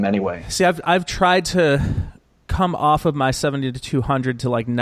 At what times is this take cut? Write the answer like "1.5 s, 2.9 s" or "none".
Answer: none